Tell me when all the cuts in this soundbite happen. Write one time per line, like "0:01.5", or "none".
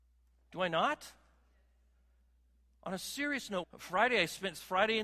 0:03.6